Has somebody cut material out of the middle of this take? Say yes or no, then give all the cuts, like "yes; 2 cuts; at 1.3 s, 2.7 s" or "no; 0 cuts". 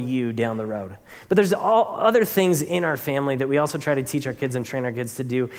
no; 0 cuts